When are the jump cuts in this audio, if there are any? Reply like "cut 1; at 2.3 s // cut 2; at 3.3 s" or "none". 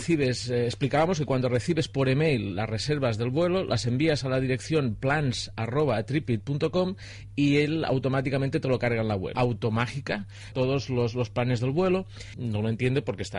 cut 1; at 9.3 s // cut 2; at 10.5 s // cut 3; at 12.3 s